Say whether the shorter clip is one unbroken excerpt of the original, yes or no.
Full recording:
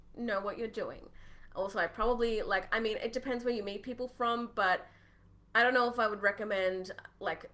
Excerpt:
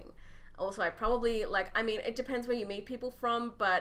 yes